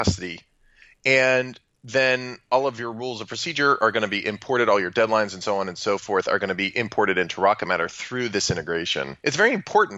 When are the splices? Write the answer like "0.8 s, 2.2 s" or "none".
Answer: none